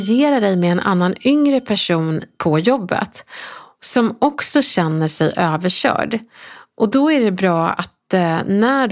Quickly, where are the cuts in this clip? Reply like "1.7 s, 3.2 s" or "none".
none

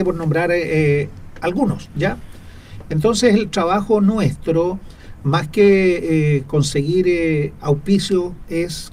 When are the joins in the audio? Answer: 2.9 s

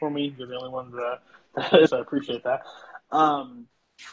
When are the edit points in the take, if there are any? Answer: 1.9 s

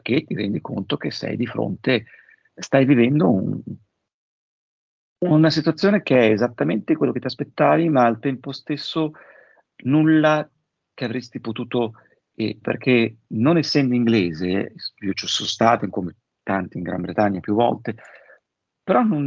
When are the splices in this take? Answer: 2.5 s, 12.6 s

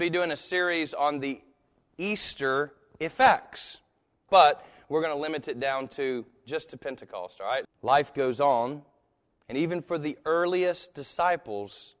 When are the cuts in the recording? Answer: 4.3 s, 7.6 s

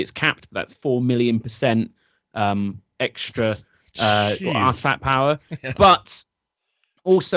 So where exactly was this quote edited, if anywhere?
none

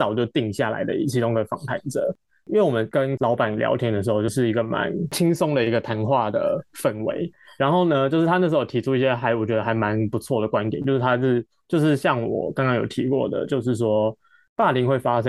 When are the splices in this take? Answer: 4.3 s

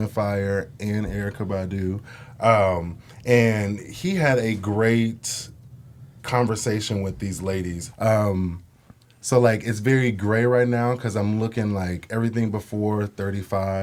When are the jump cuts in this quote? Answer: 7.9 s

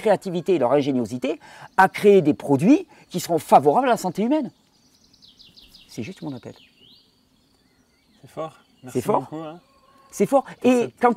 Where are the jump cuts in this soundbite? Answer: none

